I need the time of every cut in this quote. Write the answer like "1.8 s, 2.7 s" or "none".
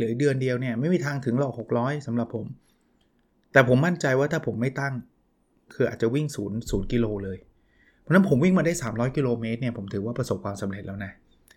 none